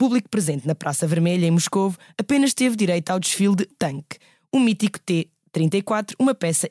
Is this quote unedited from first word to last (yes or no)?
no